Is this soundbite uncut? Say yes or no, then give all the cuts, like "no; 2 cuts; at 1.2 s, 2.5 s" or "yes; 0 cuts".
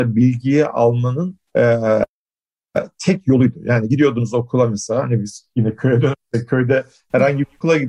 no; 1 cut; at 1.5 s